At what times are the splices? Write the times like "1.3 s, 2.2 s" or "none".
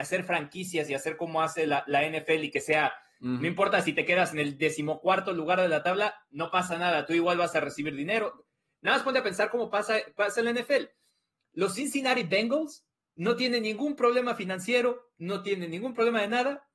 none